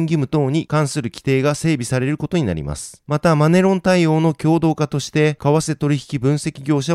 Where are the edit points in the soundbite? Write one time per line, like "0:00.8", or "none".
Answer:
none